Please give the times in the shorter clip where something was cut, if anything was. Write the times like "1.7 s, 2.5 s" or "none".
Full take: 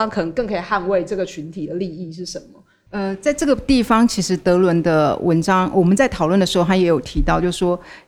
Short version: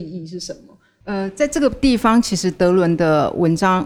none